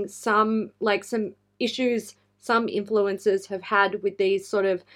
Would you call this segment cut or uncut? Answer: uncut